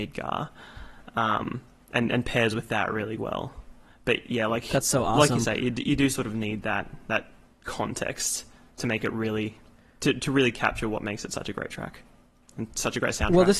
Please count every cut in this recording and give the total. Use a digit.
0